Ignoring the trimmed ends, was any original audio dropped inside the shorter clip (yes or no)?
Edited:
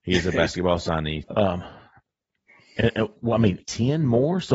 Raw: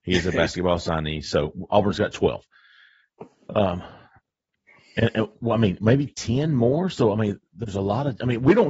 yes